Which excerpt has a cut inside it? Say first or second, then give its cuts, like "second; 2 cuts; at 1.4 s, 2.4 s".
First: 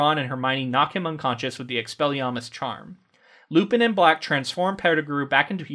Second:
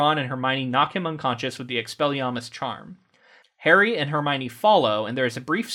second; 1 cut; at 3.4 s